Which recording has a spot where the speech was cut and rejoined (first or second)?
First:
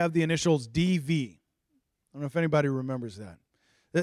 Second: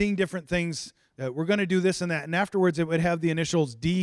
second